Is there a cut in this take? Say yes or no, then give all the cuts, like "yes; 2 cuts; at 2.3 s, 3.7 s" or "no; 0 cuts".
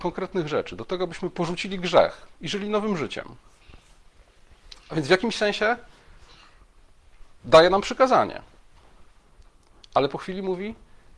yes; 1 cut; at 7.4 s